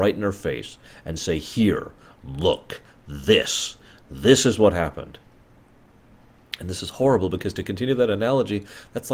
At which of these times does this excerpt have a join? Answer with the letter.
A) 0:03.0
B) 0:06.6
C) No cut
C